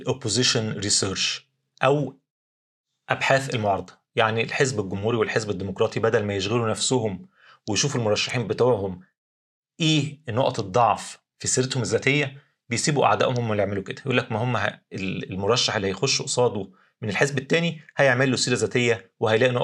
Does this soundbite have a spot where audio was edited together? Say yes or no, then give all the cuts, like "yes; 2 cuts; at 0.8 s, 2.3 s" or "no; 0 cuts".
no; 0 cuts